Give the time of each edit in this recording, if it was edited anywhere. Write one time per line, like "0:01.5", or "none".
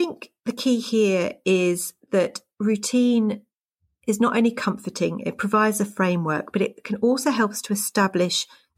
none